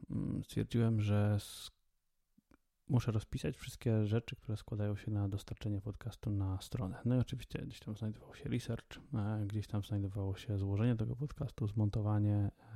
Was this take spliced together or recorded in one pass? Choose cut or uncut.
uncut